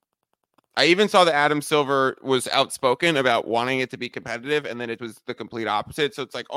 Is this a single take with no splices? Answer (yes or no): no